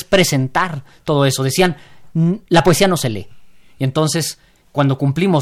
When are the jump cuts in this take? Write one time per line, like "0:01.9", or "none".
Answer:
none